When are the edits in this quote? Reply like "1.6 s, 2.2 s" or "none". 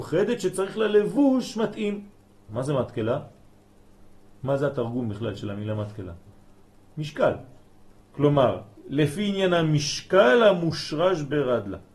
2.5 s, 8.0 s

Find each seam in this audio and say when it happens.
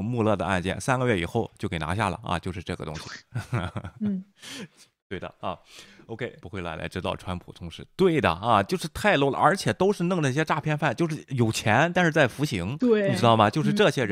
6.4 s

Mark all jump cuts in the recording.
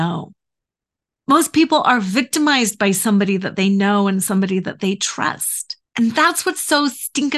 5.9 s

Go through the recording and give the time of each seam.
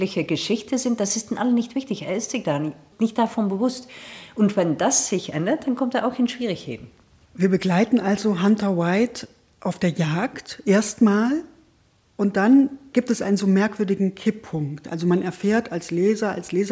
none

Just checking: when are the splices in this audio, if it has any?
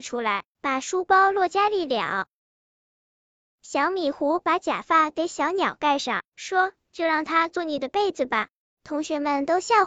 8.6 s

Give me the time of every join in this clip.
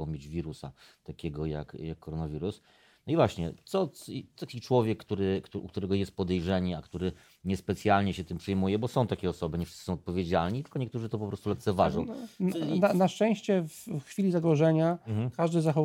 none

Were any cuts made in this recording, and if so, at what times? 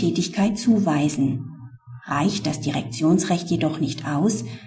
none

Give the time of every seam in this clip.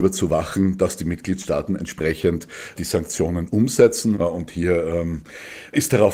4.1 s

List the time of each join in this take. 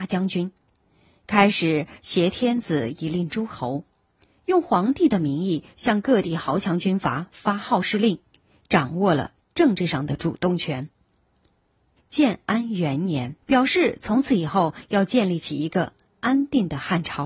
12.0 s, 13.4 s

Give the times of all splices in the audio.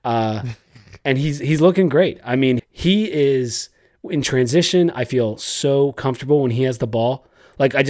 2.6 s

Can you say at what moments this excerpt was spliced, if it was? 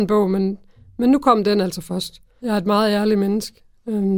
2.4 s

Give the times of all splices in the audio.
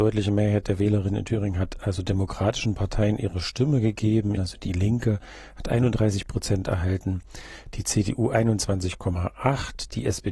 4.4 s

